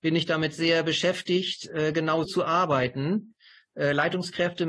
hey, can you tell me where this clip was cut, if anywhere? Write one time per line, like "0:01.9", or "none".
0:02.2